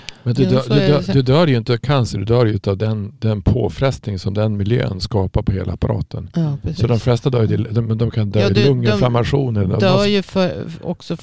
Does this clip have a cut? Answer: no; 0 cuts

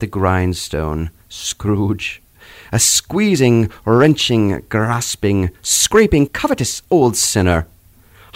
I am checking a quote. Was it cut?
yes; 1 cut; at 6.3 s

